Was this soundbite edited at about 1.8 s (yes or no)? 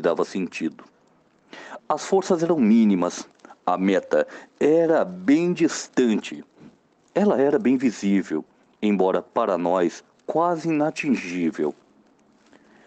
yes